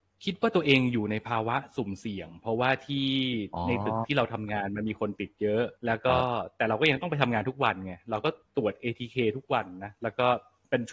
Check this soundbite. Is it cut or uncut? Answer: cut